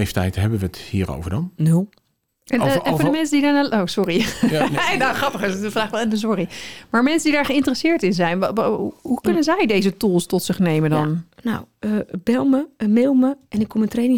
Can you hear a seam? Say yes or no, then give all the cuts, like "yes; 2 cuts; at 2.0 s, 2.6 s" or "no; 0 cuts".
yes; 1 cut; at 2.3 s